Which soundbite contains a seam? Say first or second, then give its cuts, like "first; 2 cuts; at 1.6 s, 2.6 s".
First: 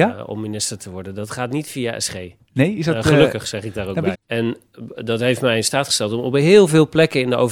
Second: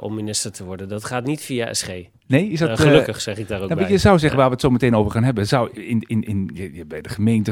first; 1 cut; at 4.1 s